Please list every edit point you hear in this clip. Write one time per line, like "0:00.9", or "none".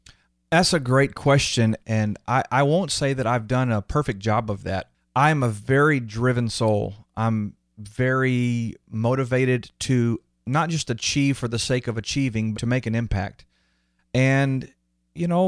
0:01.8
0:12.5